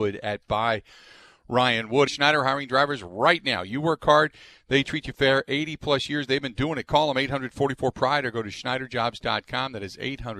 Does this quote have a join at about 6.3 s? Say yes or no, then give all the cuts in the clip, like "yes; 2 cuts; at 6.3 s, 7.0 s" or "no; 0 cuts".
no; 1 cut; at 2.1 s